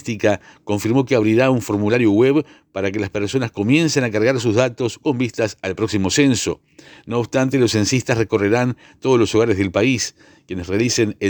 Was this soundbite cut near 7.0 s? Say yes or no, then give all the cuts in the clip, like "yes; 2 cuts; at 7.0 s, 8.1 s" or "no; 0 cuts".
no; 0 cuts